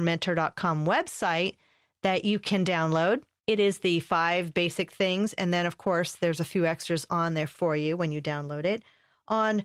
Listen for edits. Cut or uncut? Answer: uncut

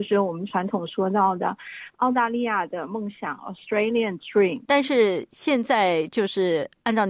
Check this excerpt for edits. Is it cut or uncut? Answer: cut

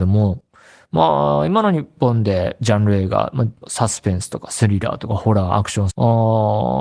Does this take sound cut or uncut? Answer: cut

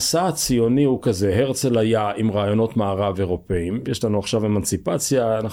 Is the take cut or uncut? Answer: cut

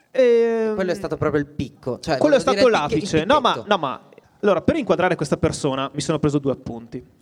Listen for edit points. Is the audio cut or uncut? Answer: cut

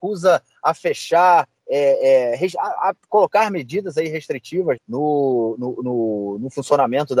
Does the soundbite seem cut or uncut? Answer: cut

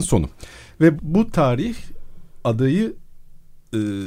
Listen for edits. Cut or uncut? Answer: cut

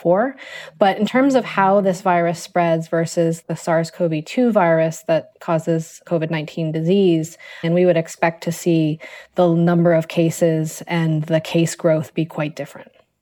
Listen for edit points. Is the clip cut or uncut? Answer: cut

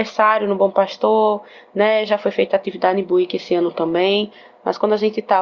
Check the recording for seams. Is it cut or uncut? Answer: uncut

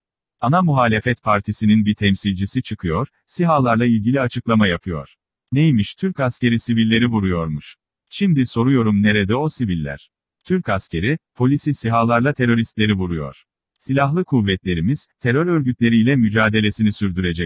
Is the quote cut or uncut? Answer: cut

